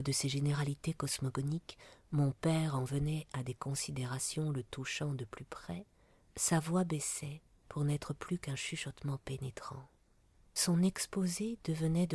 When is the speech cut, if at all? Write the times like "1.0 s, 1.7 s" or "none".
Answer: none